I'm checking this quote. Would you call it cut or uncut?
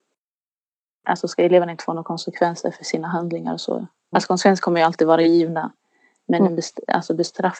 cut